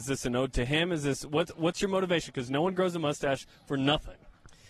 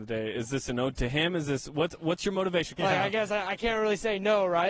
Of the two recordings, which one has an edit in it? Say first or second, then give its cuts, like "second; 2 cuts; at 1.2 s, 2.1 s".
second; 1 cut; at 2.8 s